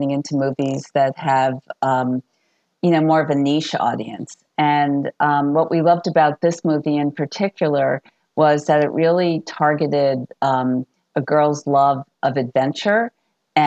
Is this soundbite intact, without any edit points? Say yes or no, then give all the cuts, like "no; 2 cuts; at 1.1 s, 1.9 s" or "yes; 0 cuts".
yes; 0 cuts